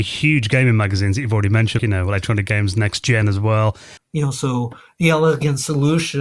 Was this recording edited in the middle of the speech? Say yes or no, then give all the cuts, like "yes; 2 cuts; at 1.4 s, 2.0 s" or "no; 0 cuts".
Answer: yes; 2 cuts; at 1.8 s, 4.0 s